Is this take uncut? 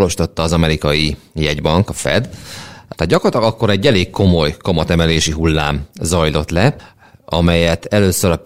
yes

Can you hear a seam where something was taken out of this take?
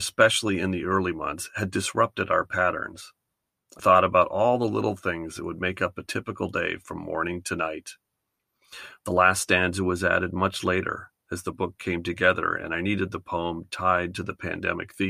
yes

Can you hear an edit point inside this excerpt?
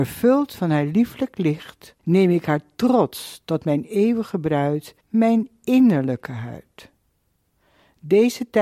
yes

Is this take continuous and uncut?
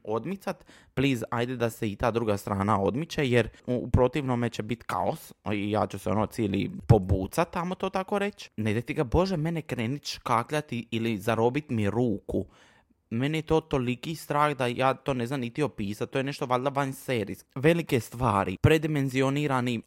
no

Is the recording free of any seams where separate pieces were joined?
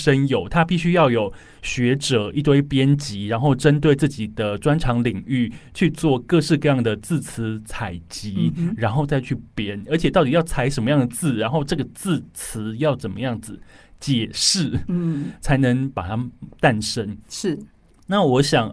yes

